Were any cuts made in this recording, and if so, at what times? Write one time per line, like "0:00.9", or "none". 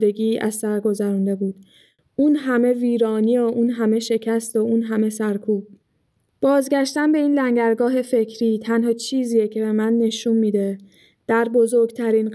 0:06.3